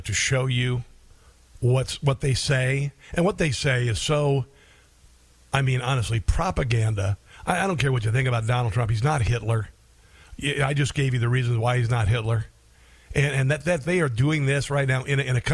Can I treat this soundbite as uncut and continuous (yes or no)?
yes